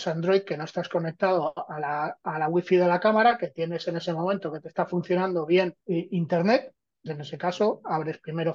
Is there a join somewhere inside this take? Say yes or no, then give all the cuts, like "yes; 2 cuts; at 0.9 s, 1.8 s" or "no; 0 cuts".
yes; 1 cut; at 7.1 s